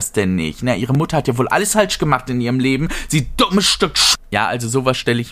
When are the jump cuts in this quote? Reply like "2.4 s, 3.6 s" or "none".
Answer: none